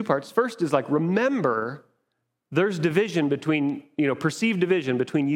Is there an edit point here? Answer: no; 0 cuts

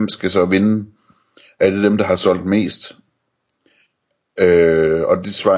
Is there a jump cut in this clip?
no; 0 cuts

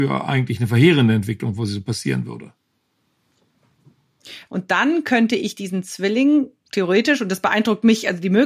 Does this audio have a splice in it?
yes; 1 cut; at 4.5 s

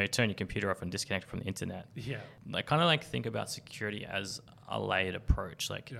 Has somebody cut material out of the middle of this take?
no; 0 cuts

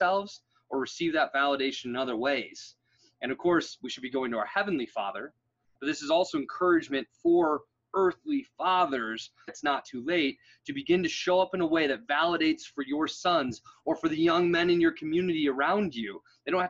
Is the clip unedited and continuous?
no; 1 cut; at 9.5 s

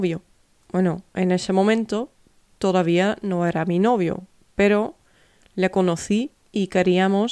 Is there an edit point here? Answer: no; 0 cuts

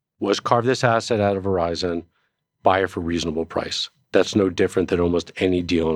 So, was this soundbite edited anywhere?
no; 0 cuts

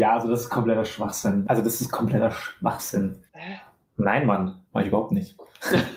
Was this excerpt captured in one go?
no; 2 cuts; at 1.4 s, 3.3 s

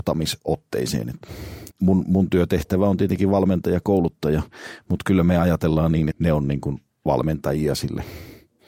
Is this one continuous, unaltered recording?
no; 2 cuts; at 1.7 s, 6.1 s

